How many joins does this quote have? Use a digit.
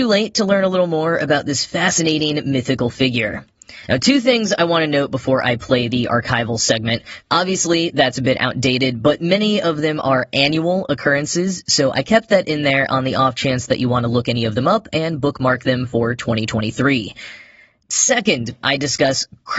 2